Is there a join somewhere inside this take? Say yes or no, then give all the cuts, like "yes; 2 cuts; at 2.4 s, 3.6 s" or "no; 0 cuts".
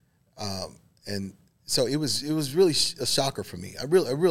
no; 0 cuts